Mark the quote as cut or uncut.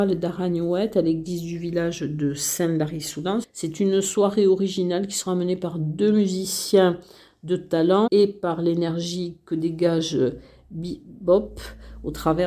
cut